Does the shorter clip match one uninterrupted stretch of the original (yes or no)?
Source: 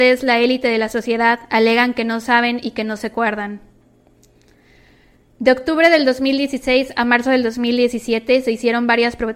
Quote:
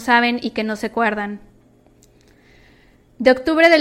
yes